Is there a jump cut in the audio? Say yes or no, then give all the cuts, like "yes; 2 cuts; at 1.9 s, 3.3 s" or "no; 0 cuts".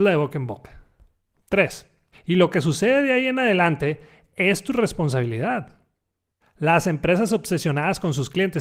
yes; 2 cuts; at 2.1 s, 6.4 s